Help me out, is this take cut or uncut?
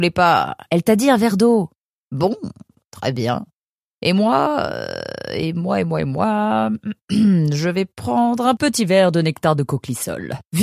uncut